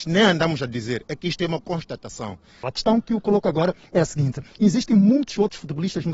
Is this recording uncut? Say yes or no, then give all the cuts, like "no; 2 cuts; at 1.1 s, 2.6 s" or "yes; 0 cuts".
no; 1 cut; at 2.6 s